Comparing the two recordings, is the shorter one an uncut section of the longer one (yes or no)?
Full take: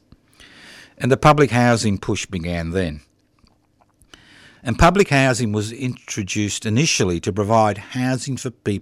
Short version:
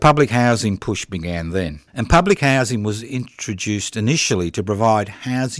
no